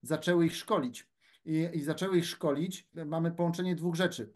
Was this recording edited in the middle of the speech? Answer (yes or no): yes